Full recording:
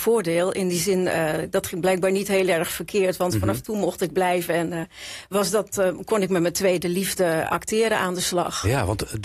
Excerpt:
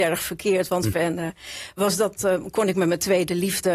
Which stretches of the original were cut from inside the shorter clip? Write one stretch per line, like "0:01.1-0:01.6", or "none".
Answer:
0:03.4-0:04.5

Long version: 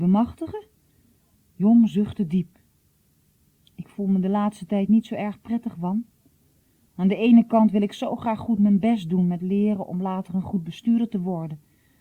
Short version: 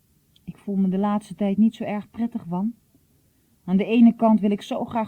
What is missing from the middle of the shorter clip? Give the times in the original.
none

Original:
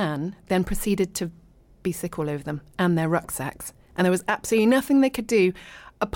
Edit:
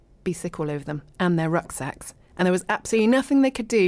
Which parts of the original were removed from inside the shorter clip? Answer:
none

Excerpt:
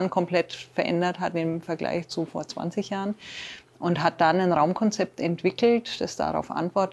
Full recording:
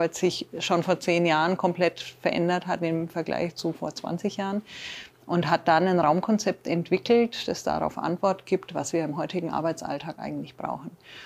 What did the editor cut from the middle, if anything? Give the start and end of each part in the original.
none

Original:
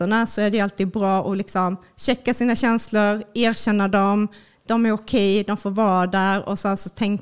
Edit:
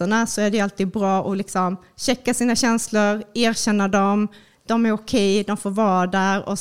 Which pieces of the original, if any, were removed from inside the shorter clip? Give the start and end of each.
none

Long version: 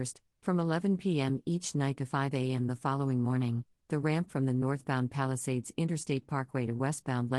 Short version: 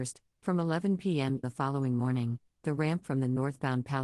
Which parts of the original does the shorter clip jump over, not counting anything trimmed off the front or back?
0:01.4-0:02.7

